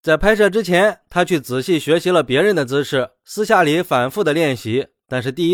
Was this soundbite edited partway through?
no; 0 cuts

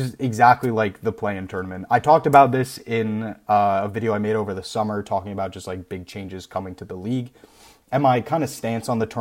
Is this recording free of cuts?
yes; 0 cuts

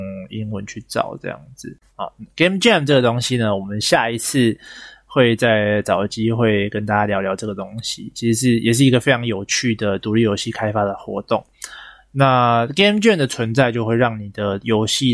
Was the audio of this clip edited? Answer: yes; 1 cut; at 1.9 s

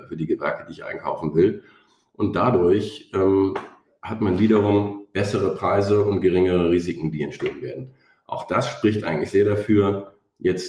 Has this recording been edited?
no; 0 cuts

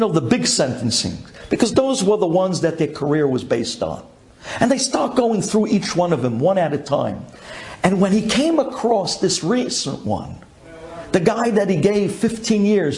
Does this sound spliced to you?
no; 0 cuts

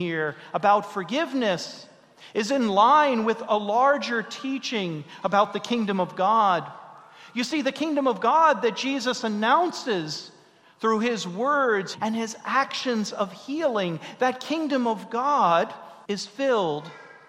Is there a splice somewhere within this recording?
yes; 1 cut; at 11.9 s

